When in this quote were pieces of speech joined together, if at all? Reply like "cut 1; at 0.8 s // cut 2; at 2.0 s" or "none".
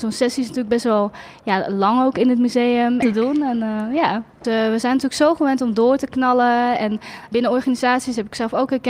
cut 1; at 3.0 s // cut 2; at 4.4 s // cut 3; at 7.3 s